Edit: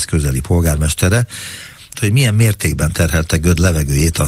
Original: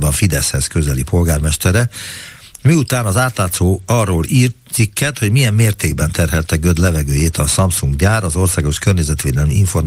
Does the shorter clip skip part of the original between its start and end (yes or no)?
yes